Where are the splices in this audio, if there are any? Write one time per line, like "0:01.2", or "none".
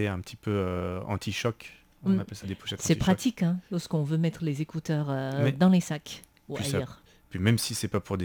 0:02.4